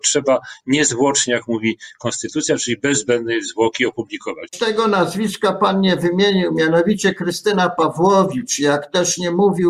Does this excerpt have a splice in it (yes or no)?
yes